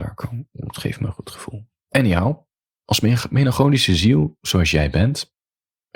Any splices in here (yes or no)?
no